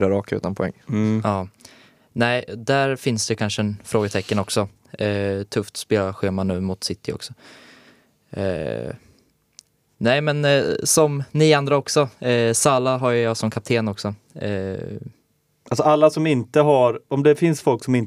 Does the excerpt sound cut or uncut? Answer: uncut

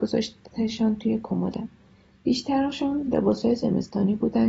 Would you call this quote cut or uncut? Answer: uncut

